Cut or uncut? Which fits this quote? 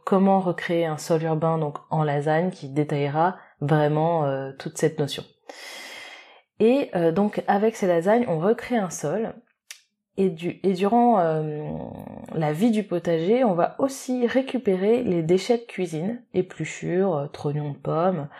uncut